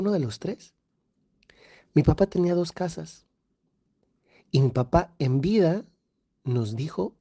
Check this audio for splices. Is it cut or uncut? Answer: uncut